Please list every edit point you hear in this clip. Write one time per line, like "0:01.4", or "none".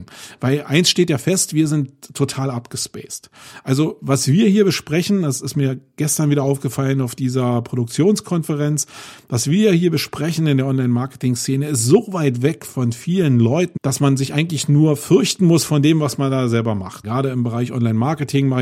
0:13.8
0:17.0

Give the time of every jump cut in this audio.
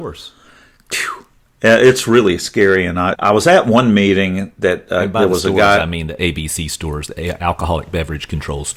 0:03.1

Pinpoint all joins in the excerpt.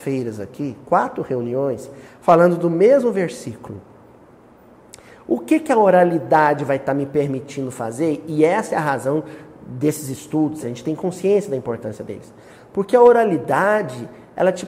0:10.6

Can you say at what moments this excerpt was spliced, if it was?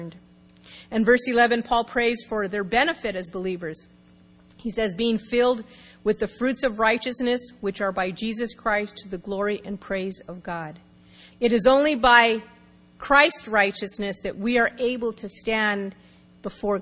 0:11.3

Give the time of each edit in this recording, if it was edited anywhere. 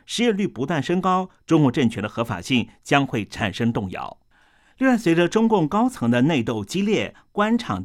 none

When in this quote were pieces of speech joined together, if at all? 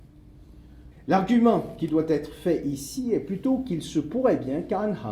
0:00.9

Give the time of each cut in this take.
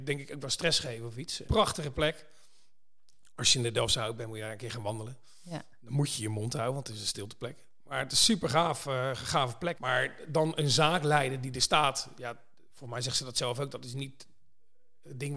0:01.4
0:09.7

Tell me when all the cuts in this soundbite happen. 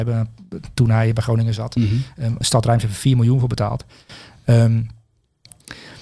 0:02.4

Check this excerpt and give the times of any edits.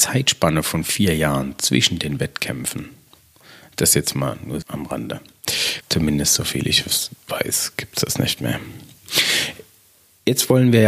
0:04.6
0:05.8

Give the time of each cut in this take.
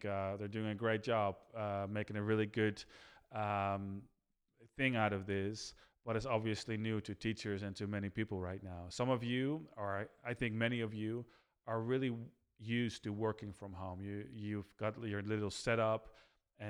none

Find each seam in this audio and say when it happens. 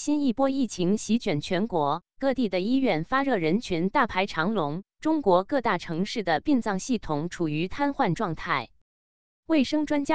none

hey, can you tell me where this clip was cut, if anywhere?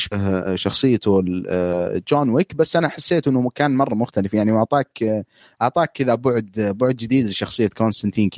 none

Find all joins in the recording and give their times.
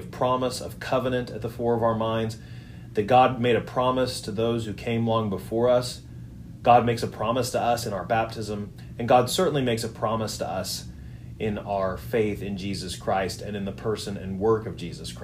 none

